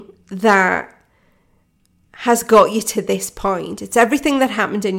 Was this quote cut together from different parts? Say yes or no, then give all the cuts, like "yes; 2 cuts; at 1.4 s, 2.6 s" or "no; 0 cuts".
no; 0 cuts